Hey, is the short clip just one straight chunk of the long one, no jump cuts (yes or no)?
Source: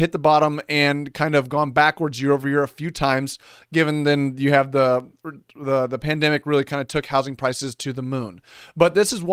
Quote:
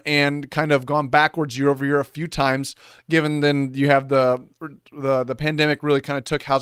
yes